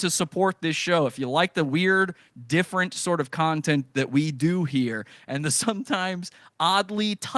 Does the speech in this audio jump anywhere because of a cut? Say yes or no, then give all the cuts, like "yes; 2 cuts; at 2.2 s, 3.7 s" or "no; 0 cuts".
no; 0 cuts